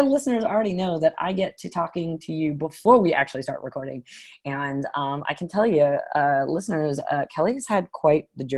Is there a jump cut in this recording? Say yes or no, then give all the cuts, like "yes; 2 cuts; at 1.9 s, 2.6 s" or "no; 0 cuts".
no; 0 cuts